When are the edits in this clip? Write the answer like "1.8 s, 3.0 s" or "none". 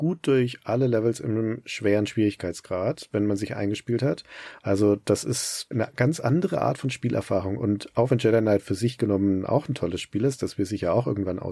4.6 s